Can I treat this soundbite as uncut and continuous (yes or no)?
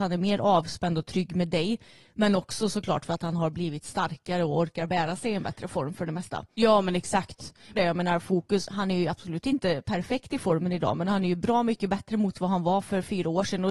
no